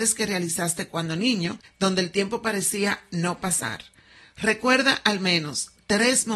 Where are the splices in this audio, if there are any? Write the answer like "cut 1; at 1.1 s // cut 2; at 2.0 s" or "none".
cut 1; at 1.6 s